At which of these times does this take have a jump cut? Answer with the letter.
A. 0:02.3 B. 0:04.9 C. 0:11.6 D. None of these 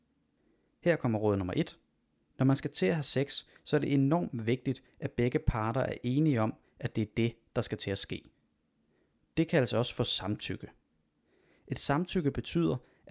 A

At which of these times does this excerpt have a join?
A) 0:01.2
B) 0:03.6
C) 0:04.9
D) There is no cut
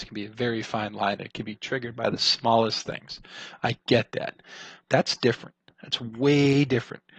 C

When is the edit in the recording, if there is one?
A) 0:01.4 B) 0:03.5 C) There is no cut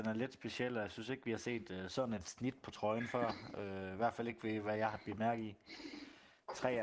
C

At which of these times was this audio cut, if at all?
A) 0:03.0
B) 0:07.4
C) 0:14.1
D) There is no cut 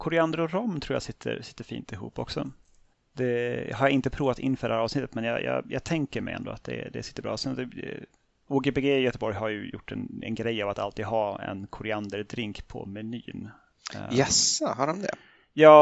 D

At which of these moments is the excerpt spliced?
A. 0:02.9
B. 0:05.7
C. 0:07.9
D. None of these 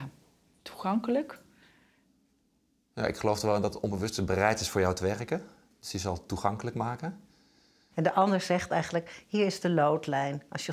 C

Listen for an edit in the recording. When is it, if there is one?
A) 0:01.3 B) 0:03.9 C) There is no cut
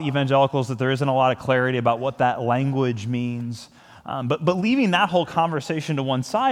C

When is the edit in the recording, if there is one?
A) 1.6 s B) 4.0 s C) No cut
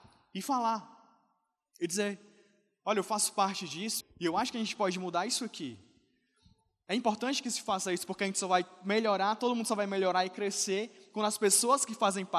B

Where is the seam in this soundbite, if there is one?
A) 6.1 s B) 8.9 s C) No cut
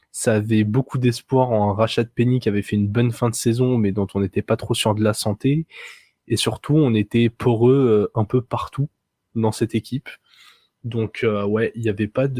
C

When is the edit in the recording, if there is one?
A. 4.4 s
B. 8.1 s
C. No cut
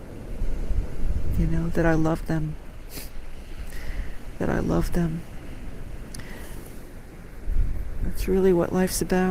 C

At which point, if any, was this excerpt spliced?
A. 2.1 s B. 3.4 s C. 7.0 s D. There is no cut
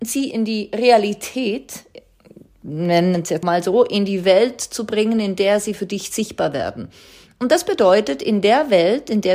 B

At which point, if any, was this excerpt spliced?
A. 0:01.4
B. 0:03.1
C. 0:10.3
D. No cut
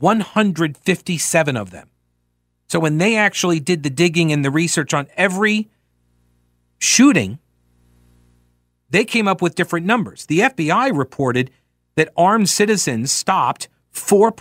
D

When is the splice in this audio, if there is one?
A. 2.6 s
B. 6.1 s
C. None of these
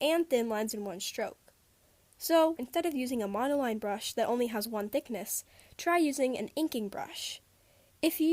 A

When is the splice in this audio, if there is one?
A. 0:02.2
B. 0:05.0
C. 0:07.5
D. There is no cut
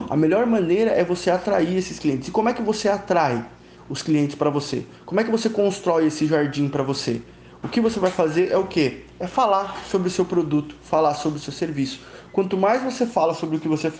D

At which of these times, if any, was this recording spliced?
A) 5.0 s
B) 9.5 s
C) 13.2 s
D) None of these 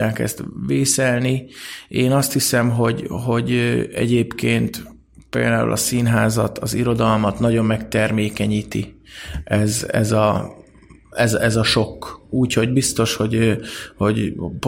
D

